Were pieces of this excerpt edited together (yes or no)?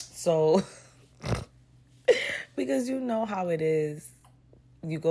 no